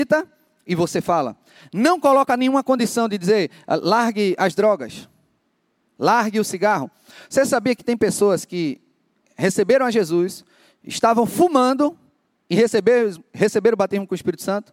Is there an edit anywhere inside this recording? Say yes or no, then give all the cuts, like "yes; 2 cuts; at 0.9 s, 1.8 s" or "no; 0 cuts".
no; 0 cuts